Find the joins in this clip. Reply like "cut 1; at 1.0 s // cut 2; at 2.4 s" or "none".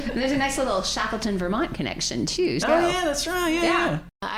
cut 1; at 2.6 s

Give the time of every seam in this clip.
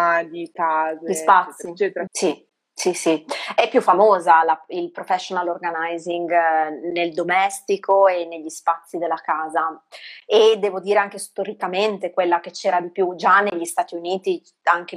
cut 1; at 2.1 s

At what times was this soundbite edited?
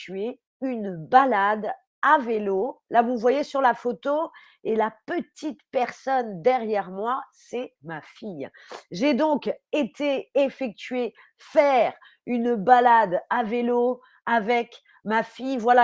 none

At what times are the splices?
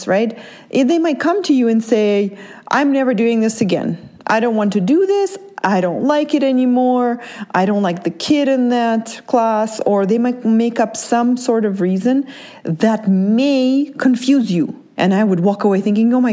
cut 1; at 15.0 s

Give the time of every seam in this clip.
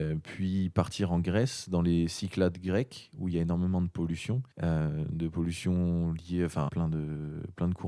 cut 1; at 4.5 s // cut 2; at 6.7 s

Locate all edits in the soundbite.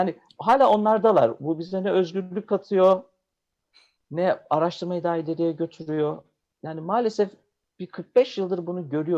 cut 1; at 4.0 s

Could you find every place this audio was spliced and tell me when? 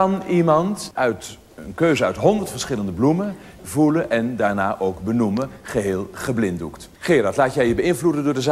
cut 1; at 3.6 s

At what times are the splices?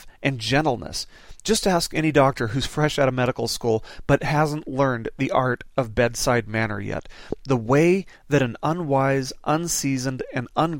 none

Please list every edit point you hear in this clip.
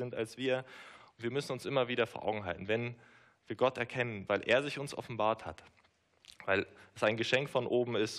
cut 1; at 4.3 s

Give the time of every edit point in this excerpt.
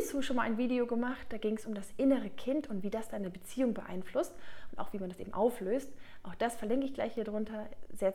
none

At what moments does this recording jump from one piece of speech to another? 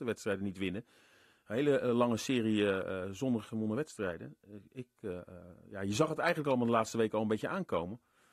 none

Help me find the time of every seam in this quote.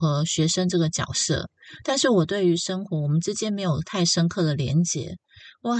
none

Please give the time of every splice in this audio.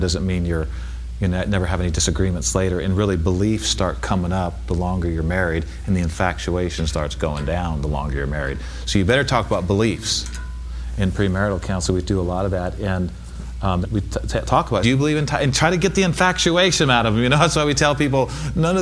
cut 1; at 13.8 s // cut 2; at 14.8 s

